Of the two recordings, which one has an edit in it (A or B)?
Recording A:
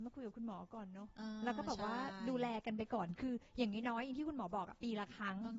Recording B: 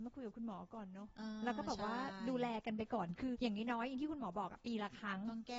B